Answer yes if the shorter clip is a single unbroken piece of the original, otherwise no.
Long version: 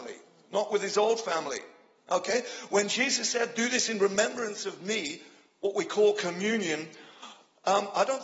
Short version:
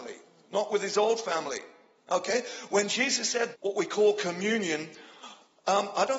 no